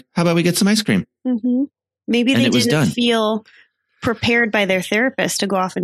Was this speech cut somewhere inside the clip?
no; 0 cuts

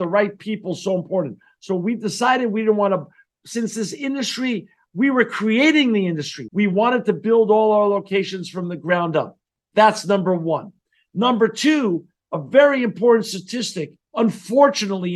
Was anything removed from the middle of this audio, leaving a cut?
yes; 1 cut; at 6.5 s

